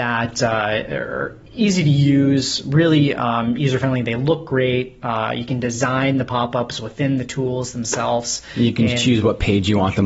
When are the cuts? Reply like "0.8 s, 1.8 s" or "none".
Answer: none